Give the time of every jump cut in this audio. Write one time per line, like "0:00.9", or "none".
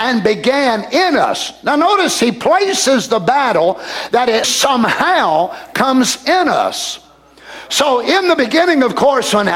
0:04.4